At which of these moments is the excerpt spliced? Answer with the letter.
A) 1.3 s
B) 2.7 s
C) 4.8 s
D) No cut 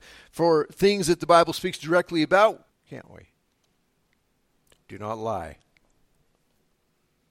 B